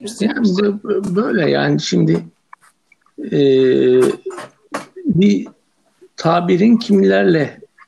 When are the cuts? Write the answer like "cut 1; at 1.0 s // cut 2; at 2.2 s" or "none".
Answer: none